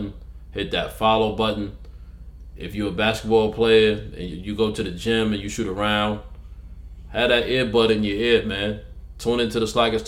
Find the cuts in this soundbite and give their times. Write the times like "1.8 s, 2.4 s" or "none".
none